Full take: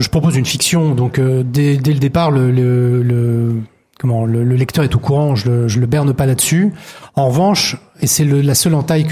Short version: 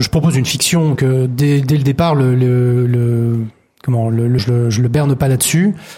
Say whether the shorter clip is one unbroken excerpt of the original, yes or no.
no